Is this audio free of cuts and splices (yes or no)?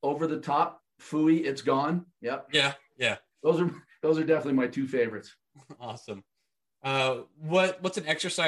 yes